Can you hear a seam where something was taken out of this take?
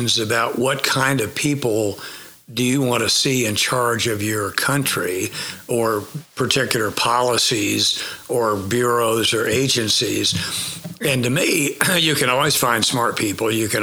no; 0 cuts

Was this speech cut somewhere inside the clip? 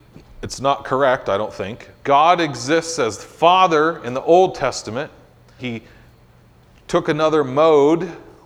yes; 2 cuts; at 2.0 s, 5.6 s

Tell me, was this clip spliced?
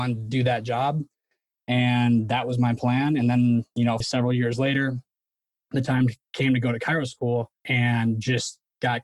yes; 2 cuts; at 4.0 s, 7.6 s

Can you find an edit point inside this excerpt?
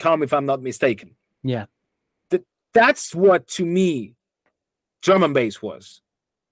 no; 0 cuts

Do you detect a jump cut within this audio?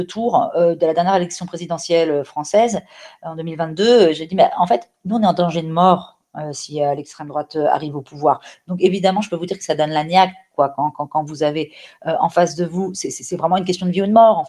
no; 0 cuts

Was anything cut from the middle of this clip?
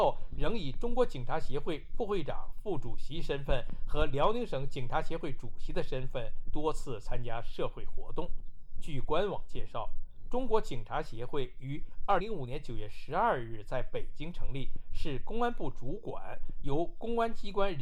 yes; 1 cut; at 12.2 s

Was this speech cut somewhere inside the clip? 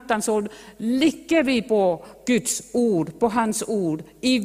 no; 0 cuts

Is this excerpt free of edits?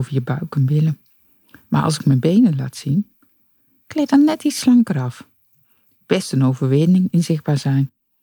yes; 0 cuts

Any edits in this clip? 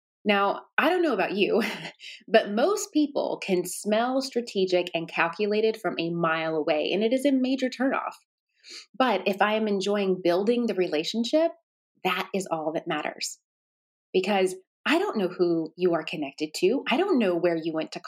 no; 0 cuts

